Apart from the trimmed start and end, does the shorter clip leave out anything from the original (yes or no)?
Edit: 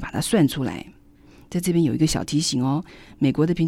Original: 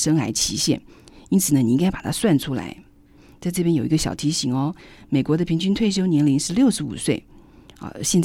no